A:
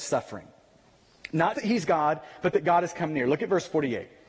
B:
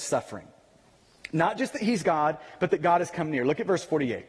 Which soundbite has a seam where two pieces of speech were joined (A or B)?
A